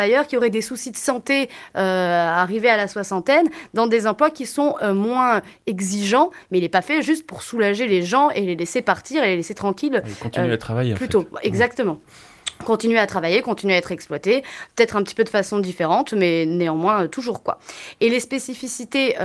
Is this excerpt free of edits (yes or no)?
yes